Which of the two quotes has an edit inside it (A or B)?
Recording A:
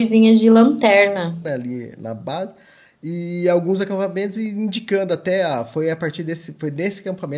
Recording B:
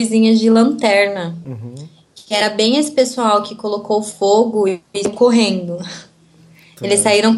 A